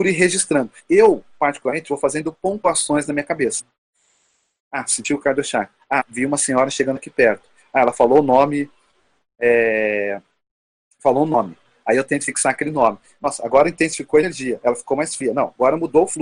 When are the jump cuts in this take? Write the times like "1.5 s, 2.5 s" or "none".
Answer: none